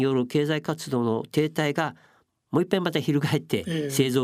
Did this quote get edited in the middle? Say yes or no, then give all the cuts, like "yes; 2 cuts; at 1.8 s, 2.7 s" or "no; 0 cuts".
no; 0 cuts